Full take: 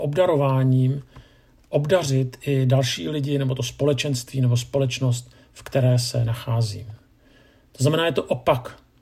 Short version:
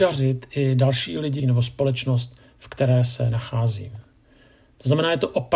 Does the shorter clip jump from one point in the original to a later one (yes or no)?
yes